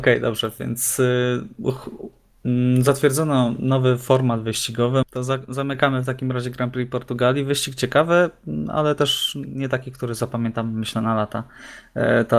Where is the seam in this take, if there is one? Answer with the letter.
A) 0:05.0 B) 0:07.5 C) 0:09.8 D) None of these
A